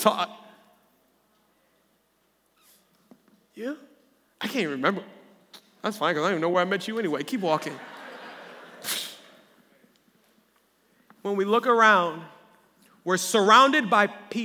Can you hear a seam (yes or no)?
no